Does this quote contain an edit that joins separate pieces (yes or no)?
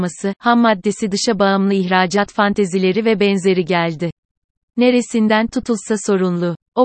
no